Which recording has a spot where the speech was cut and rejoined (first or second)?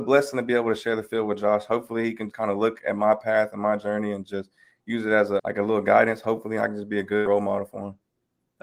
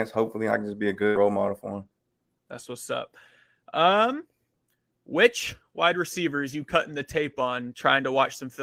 first